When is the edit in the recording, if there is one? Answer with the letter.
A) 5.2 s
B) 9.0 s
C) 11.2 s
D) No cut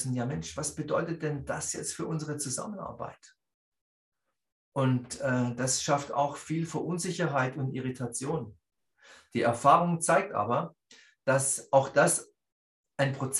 D